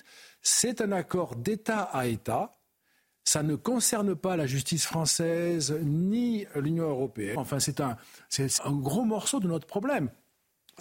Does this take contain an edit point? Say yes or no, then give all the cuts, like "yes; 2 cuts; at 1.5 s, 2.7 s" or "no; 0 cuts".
yes; 2 cuts; at 7.3 s, 8.6 s